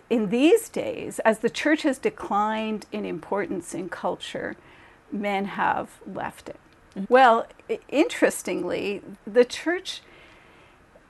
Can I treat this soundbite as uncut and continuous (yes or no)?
no